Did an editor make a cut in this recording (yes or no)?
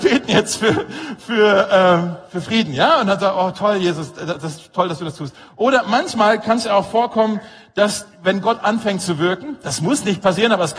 no